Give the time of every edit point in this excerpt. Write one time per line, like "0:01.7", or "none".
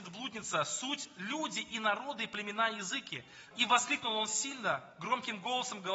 0:03.5